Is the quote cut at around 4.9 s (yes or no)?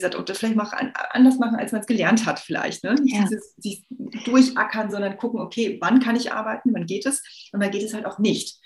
no